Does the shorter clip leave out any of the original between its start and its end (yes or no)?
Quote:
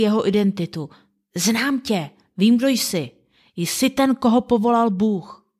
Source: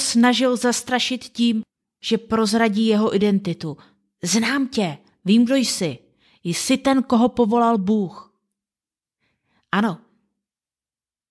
no